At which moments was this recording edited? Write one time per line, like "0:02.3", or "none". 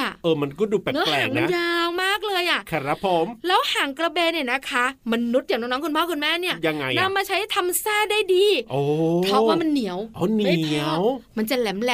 none